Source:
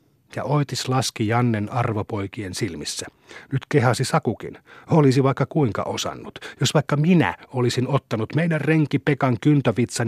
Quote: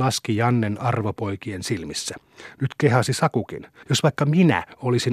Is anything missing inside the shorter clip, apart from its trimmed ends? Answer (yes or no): yes